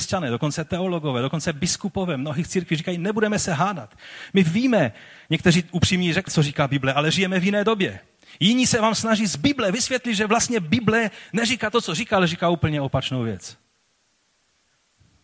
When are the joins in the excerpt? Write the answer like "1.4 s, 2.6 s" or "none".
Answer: 6.3 s

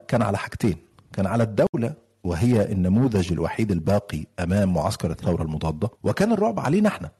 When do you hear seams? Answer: 6.0 s

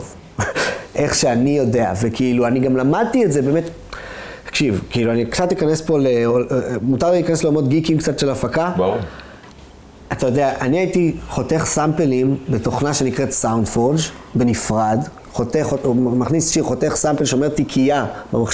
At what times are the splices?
none

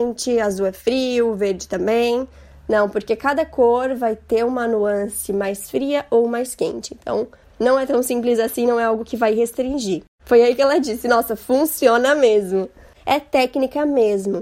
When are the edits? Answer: 10.2 s, 12.9 s

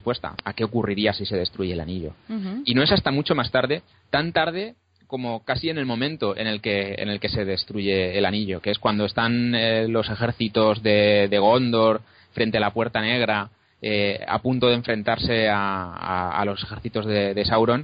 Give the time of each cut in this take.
none

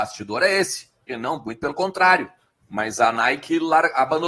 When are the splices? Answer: 1.1 s, 2.5 s

